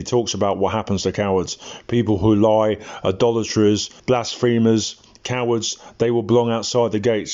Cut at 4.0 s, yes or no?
yes